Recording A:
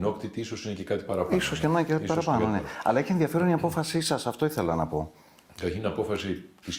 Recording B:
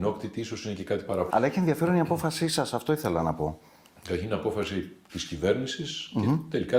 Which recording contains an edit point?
B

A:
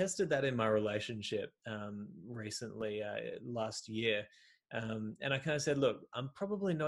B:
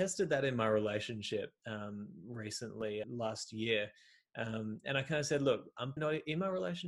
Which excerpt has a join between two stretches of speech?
B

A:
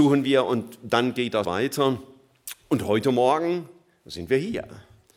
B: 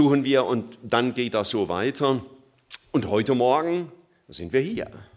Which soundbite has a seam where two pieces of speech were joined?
A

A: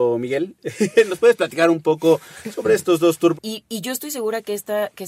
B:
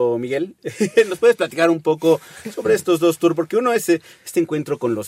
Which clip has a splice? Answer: A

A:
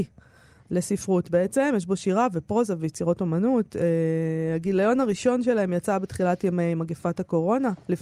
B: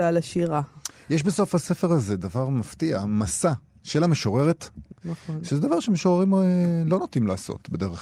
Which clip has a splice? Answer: B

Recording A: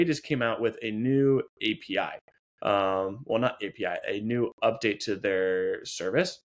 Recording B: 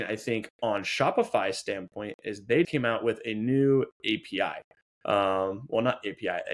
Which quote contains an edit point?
B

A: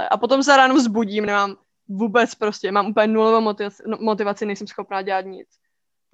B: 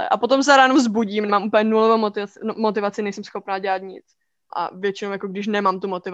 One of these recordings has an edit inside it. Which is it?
B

